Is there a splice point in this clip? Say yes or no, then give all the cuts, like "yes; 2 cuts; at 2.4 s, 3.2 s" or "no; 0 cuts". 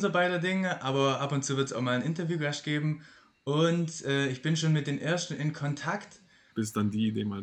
yes; 1 cut; at 6.5 s